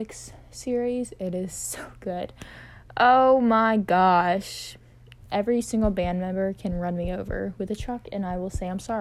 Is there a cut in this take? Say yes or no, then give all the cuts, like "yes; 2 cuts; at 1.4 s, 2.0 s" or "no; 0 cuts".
no; 0 cuts